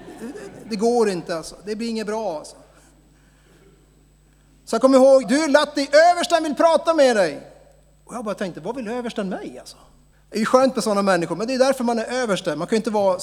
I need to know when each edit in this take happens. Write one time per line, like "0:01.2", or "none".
0:05.2
0:10.1